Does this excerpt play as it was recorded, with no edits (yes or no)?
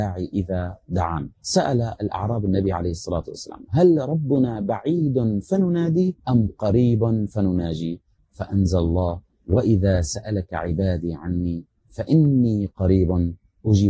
no